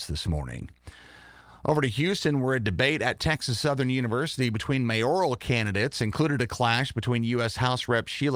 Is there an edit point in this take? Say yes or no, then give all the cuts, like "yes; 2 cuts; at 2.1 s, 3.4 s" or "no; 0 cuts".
no; 0 cuts